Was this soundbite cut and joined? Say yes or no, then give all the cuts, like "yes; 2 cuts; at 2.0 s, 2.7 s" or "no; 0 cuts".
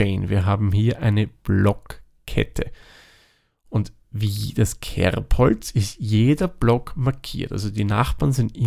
no; 0 cuts